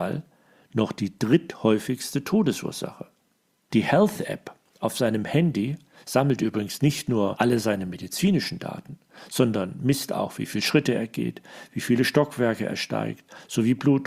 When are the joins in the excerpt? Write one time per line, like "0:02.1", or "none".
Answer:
0:03.7